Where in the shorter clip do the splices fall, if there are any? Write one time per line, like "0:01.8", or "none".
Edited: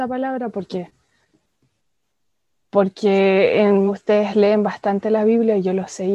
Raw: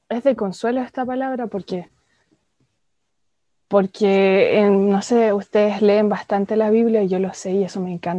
0:03.9